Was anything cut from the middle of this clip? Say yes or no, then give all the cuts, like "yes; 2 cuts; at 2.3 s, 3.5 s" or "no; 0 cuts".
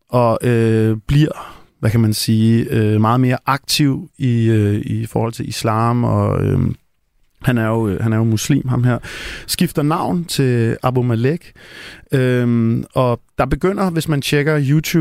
no; 0 cuts